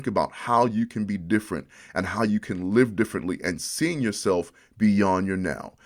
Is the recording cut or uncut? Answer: uncut